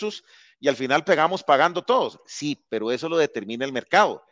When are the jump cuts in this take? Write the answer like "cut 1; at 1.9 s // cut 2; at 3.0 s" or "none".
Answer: none